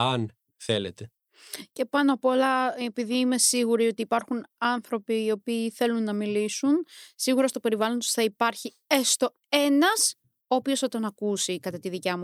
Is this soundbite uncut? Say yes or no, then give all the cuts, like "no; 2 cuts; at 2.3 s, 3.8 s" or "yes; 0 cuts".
yes; 0 cuts